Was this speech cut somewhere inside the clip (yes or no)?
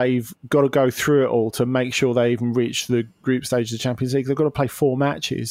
no